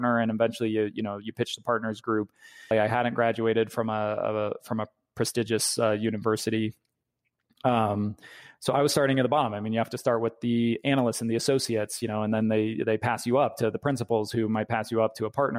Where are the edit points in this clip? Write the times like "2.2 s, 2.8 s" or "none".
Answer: 2.7 s